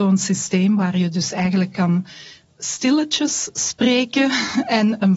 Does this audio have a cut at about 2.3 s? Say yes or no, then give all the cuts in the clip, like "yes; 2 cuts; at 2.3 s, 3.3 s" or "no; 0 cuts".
no; 0 cuts